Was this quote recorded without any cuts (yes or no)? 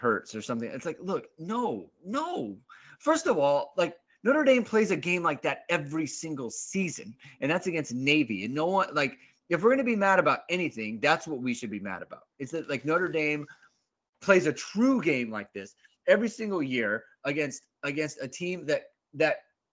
yes